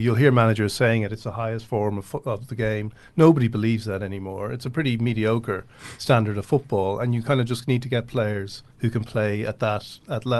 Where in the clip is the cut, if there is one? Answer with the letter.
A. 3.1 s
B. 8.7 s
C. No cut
B